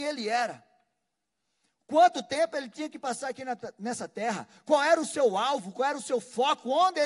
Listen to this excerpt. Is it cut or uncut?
uncut